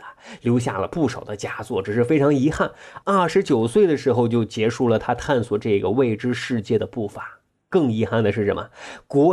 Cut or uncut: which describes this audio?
uncut